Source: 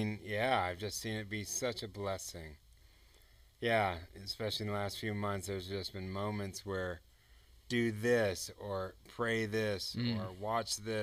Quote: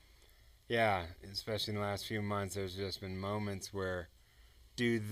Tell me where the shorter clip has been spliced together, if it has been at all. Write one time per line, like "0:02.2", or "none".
none